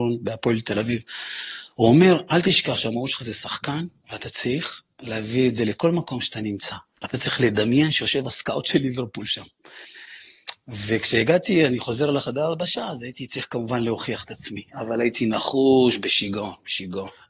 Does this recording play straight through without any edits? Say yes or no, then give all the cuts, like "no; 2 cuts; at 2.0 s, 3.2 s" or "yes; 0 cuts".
no; 1 cut; at 7.0 s